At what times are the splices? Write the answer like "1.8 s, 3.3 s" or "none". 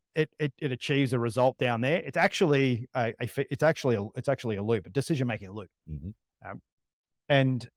none